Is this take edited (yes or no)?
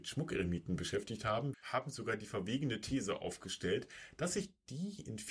yes